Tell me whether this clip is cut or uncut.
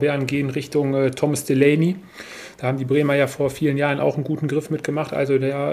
uncut